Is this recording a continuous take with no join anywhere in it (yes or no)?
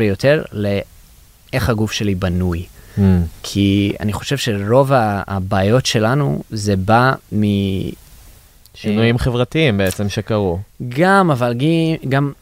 yes